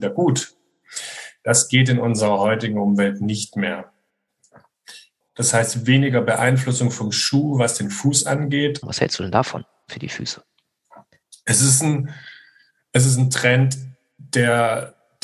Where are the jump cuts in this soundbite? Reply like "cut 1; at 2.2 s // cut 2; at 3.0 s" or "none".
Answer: cut 1; at 5.2 s // cut 2; at 8.8 s